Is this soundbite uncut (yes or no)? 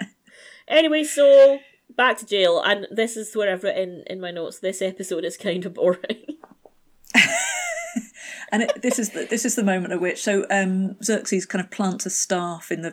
yes